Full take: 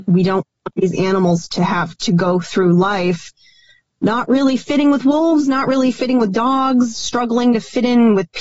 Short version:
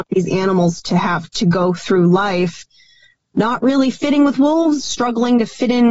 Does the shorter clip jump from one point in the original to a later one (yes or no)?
yes